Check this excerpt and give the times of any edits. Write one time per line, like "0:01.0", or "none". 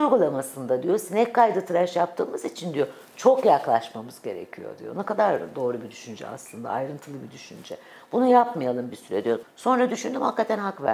0:09.4